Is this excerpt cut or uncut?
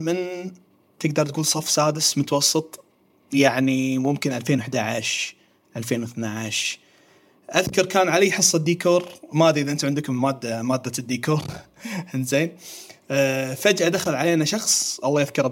uncut